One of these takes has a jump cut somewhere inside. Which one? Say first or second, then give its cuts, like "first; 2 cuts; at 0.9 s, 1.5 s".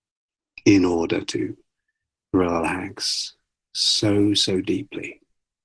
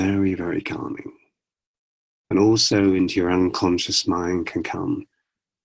second; 1 cut; at 2.2 s